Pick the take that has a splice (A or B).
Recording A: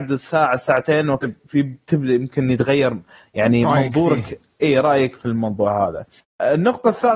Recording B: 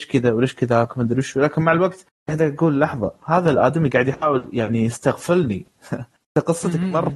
A